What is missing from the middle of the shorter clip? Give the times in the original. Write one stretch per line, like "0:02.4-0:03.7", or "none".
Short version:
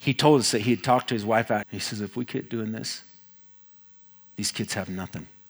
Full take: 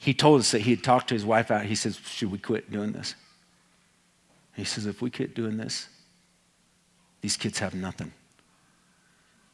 0:01.6-0:04.5